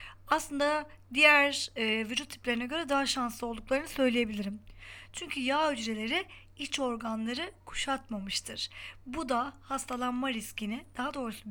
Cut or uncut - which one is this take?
uncut